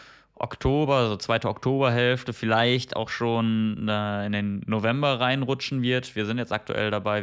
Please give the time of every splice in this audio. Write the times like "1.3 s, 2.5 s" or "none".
none